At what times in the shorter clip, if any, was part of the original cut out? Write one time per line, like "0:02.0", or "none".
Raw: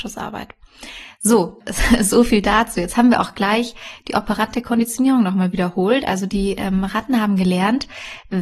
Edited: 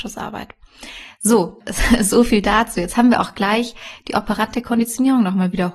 none